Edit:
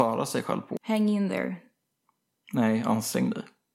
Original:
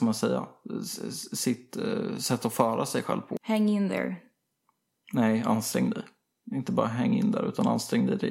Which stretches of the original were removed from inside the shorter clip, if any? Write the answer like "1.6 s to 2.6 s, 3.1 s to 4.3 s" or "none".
none